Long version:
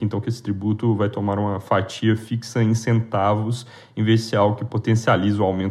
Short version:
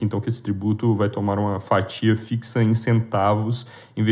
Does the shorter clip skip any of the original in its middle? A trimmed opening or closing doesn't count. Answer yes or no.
no